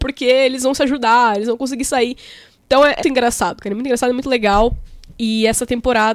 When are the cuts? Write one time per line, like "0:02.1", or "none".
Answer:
0:03.0